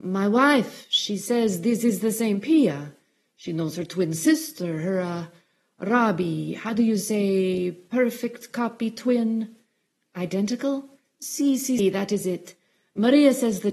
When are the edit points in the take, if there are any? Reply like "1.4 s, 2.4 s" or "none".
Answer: 11.8 s